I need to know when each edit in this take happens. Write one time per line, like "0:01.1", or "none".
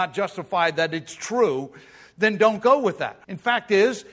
0:03.2

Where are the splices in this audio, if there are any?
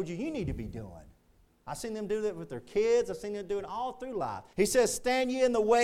0:04.5

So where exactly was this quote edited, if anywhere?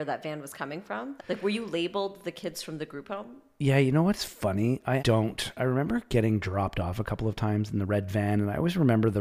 0:01.2
0:05.0

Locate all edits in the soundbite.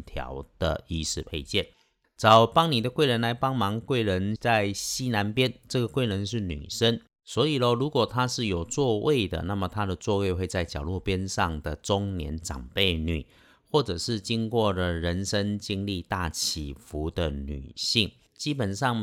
none

